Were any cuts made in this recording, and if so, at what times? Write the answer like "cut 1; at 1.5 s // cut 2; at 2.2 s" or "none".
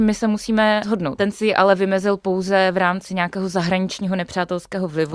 cut 1; at 1.2 s